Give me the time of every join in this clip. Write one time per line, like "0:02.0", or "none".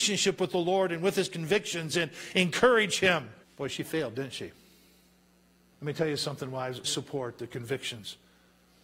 0:03.4
0:05.7
0:06.8